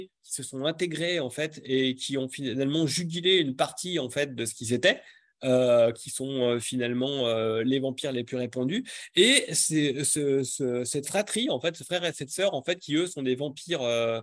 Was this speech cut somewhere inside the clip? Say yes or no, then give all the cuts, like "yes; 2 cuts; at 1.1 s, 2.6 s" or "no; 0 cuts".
no; 0 cuts